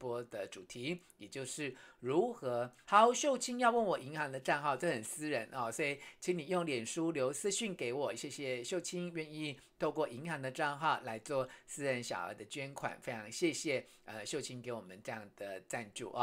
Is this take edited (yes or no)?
yes